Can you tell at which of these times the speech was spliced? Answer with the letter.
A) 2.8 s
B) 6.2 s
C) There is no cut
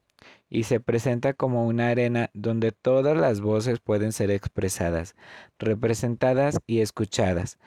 C